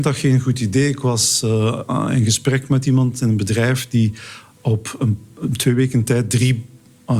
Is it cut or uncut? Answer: uncut